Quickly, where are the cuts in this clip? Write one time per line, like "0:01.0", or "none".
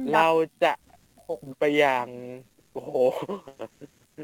0:01.5